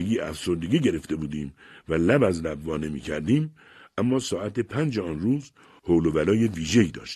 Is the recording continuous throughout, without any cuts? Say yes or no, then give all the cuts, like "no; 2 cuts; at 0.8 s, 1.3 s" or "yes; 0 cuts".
yes; 0 cuts